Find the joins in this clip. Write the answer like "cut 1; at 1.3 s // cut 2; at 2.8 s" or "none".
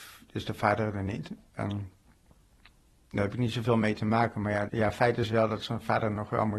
cut 1; at 4.7 s